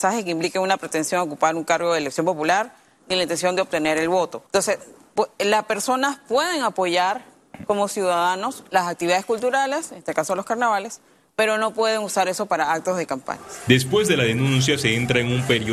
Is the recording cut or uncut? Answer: cut